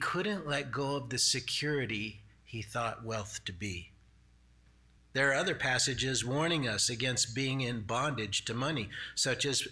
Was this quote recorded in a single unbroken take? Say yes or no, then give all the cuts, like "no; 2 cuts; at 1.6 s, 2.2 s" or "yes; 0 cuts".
no; 1 cut; at 5.0 s